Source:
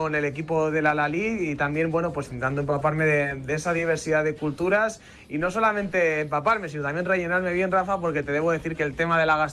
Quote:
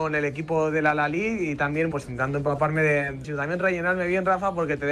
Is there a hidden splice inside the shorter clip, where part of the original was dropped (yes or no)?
yes